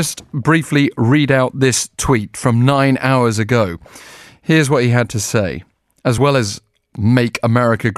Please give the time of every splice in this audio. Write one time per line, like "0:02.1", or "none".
none